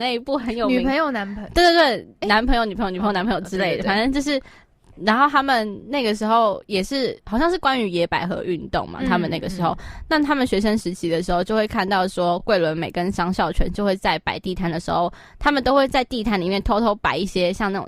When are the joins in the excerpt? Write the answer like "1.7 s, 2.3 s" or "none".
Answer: none